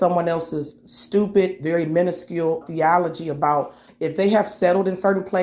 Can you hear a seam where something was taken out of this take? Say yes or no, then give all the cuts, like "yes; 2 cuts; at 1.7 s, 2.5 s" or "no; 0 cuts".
yes; 2 cuts; at 2.6 s, 3.9 s